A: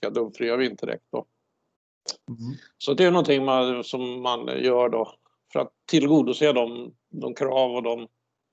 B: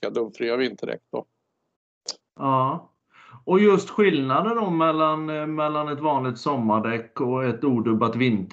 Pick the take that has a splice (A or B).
B